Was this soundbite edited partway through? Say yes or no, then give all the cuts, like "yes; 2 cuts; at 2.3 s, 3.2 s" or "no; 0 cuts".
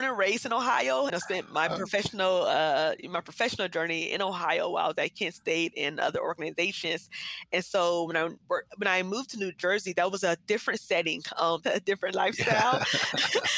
yes; 2 cuts; at 1.1 s, 11.6 s